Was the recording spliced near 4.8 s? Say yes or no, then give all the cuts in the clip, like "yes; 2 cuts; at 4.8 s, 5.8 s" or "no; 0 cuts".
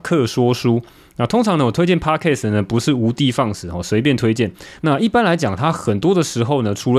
yes; 1 cut; at 4.8 s